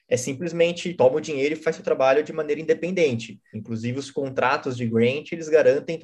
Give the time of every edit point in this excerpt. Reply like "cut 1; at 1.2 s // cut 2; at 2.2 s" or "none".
cut 1; at 0.9 s // cut 2; at 3.5 s